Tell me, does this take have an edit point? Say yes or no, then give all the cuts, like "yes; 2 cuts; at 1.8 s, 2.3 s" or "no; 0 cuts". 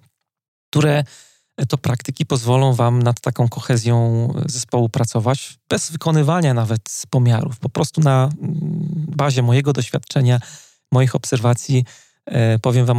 no; 0 cuts